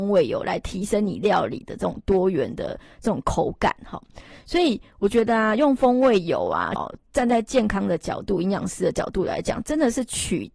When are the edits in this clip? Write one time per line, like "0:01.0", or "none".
0:06.8

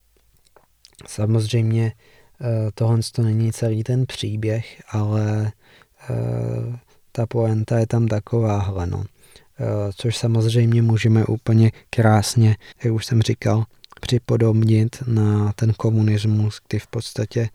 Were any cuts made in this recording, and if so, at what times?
0:12.7

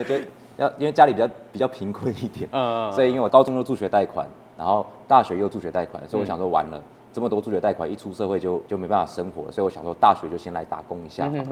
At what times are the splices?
none

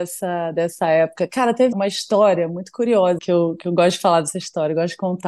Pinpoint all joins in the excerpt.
0:01.7
0:03.2

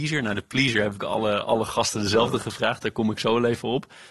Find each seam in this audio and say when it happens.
none

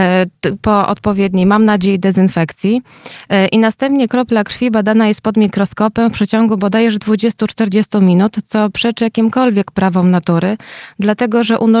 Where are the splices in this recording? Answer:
none

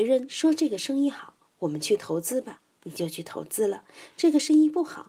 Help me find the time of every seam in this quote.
none

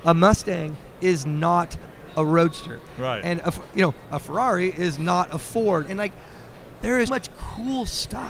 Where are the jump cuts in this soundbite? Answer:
0:05.8
0:07.1

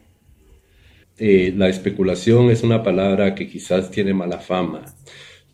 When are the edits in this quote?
0:01.0

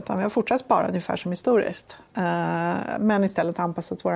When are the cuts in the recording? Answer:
none

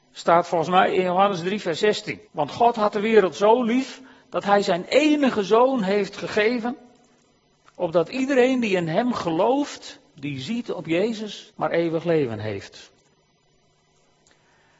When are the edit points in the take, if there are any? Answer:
0:02.3
0:11.5

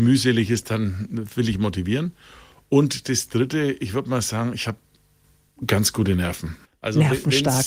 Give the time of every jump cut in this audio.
none

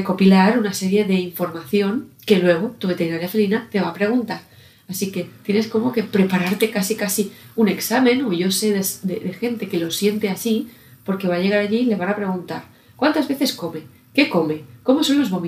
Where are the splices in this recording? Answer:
none

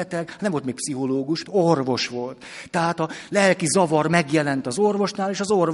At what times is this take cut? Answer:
0:01.4

